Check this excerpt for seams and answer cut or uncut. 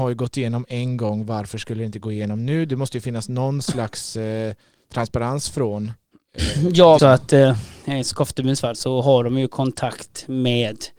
cut